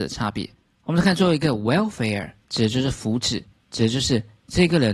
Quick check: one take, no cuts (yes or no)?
no